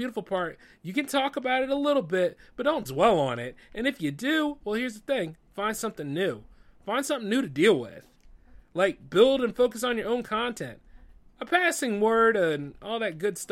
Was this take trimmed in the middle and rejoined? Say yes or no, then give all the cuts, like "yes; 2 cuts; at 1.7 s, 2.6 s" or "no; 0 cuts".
no; 0 cuts